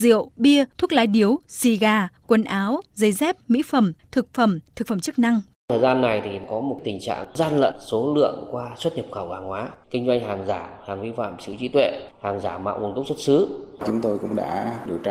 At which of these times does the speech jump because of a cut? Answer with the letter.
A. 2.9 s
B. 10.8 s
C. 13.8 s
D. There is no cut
C